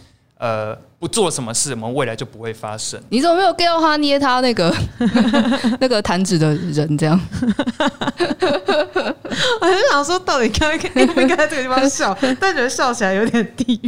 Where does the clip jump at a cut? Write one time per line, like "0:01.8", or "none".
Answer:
0:03.1